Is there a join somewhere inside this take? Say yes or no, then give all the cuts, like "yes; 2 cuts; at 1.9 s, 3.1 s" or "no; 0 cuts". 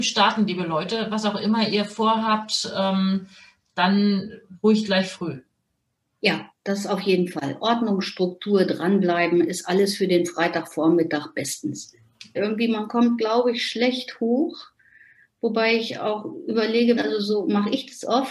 yes; 2 cuts; at 12.4 s, 17.0 s